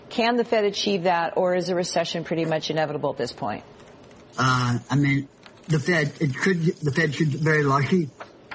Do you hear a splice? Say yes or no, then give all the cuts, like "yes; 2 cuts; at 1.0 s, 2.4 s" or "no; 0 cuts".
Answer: yes; 1 cut; at 4.3 s